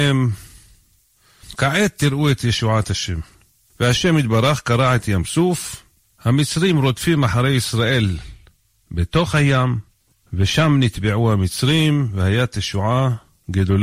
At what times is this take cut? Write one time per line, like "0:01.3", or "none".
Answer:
0:03.7